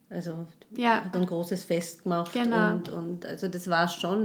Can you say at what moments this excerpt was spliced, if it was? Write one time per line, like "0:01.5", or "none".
0:01.1